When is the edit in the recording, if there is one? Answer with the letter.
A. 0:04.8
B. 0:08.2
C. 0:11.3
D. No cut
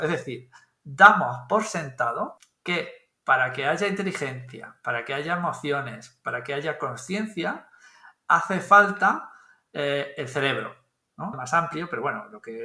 C